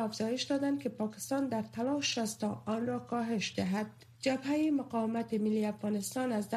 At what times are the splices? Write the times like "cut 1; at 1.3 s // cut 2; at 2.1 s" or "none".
cut 1; at 4.1 s